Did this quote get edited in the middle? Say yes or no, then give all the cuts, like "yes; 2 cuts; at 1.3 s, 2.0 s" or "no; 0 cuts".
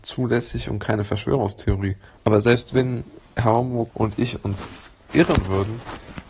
yes; 2 cuts; at 2.2 s, 3.9 s